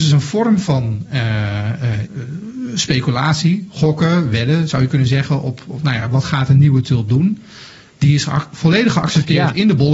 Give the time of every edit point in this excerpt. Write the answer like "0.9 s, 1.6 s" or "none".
2.1 s